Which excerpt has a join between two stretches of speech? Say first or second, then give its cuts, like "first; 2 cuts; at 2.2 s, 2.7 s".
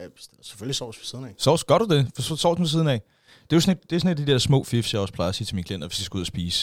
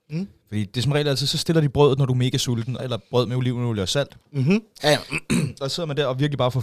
second; 2 cuts; at 2.8 s, 4.8 s